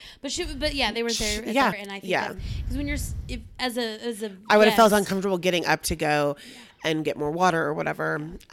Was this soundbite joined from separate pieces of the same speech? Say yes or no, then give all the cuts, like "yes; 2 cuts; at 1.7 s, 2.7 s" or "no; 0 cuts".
yes; 1 cut; at 1.7 s